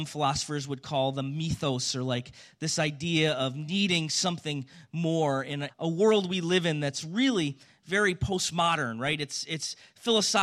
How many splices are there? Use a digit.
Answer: 1